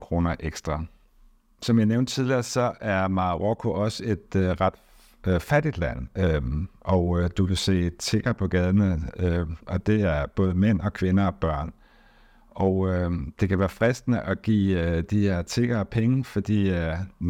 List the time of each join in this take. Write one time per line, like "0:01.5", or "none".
none